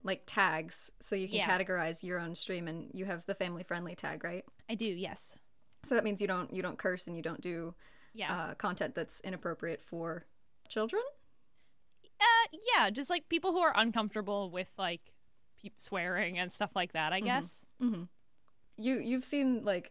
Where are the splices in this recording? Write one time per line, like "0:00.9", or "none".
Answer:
none